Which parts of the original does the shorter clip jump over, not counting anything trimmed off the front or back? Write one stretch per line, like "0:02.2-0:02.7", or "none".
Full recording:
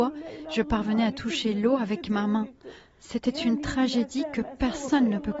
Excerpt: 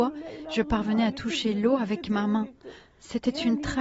none